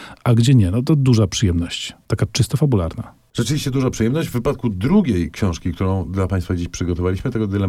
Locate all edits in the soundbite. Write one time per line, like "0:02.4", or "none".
none